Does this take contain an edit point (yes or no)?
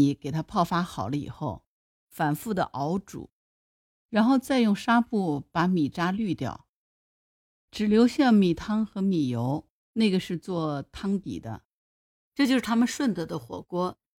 no